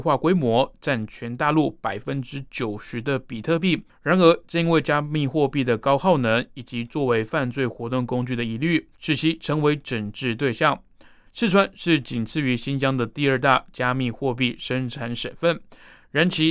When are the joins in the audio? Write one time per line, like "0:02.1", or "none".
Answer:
0:03.9
0:08.9
0:11.3